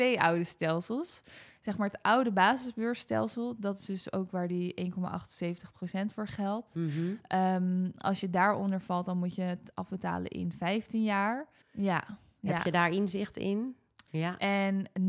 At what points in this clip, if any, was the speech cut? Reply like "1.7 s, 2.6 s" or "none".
11.6 s, 14.1 s